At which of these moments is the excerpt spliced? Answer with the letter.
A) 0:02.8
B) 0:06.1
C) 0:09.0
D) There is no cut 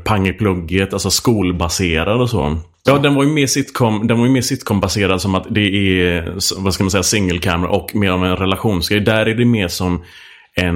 A